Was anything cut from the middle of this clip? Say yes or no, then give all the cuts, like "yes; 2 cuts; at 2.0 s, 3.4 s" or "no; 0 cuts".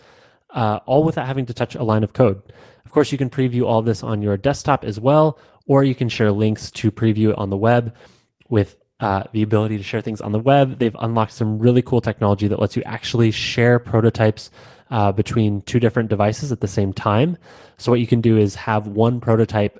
no; 0 cuts